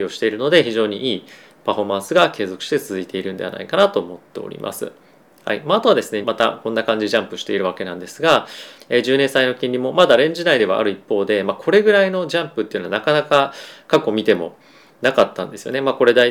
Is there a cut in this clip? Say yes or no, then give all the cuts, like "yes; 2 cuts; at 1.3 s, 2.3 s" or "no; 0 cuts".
yes; 2 cuts; at 6.2 s, 8.8 s